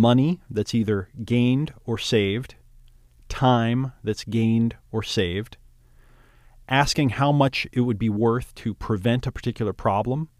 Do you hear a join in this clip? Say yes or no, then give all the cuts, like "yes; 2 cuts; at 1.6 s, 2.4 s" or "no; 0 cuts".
no; 0 cuts